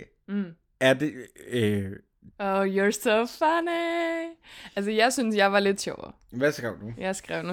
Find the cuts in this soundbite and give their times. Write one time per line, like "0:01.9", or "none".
0:02.3